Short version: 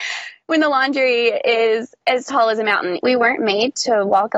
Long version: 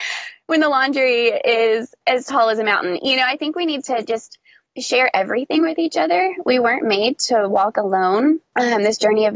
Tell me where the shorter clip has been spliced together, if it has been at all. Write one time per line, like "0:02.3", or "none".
0:03.0